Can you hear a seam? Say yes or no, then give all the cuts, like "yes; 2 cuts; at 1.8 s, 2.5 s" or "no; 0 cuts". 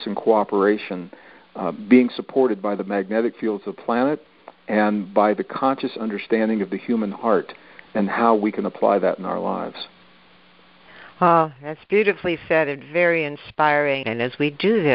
yes; 1 cut; at 14.0 s